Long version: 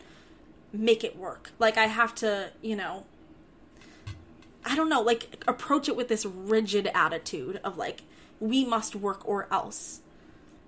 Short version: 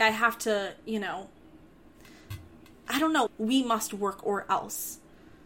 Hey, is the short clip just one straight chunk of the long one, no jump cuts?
no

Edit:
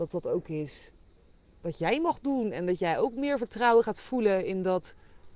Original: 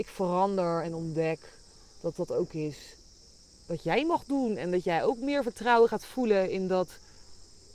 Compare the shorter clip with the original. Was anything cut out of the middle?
no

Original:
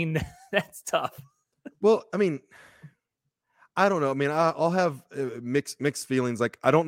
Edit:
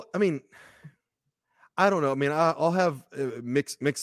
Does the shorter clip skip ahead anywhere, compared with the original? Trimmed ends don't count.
no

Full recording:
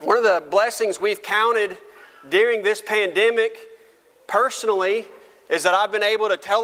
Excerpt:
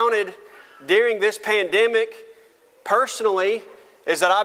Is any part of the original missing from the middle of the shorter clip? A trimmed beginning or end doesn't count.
no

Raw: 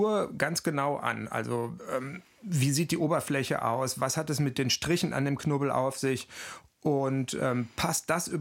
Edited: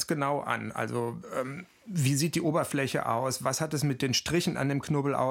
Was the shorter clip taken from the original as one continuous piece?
yes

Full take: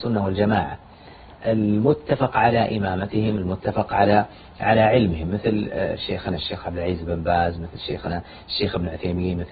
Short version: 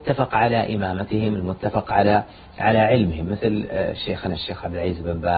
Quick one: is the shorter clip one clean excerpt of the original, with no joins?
yes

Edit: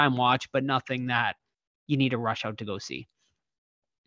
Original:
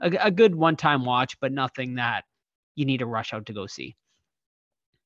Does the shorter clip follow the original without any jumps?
yes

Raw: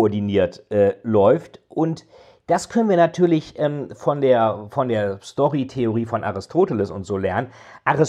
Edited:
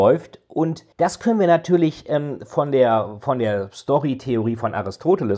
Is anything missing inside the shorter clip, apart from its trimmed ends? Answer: yes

